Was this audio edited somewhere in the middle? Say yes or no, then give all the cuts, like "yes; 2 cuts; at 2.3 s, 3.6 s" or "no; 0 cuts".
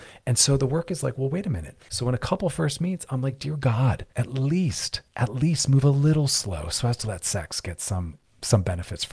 yes; 3 cuts; at 1.9 s, 4.1 s, 7.0 s